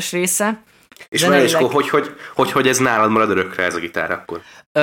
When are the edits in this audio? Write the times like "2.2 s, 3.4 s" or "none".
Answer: none

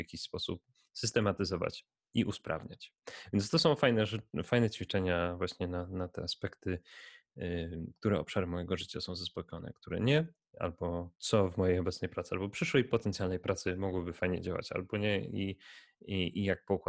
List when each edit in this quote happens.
11.2 s

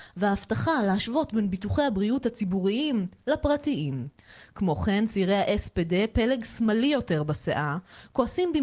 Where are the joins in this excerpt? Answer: none

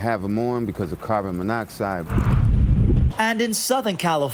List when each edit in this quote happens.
3.1 s

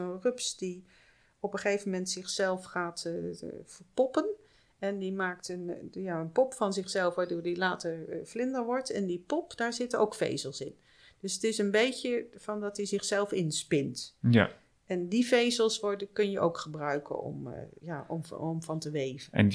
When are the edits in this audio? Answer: none

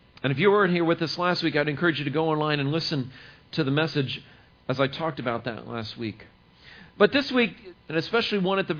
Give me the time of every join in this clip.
7.7 s

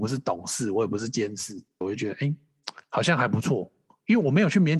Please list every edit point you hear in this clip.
1.8 s

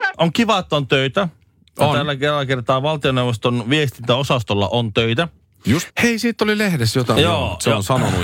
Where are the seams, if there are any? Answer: 5.9 s, 7.2 s

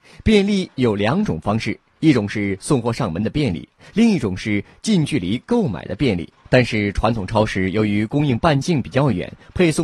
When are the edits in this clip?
none

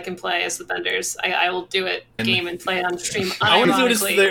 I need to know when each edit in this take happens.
2.2 s

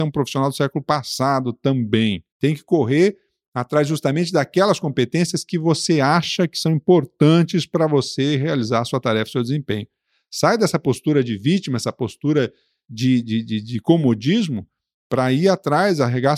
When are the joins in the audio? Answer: 2.3 s

